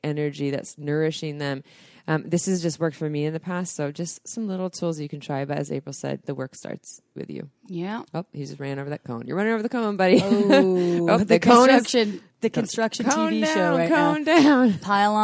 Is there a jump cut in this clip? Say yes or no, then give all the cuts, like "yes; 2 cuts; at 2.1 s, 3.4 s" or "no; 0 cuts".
no; 0 cuts